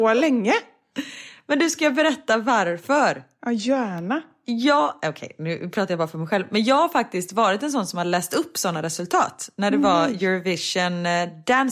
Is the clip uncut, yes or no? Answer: yes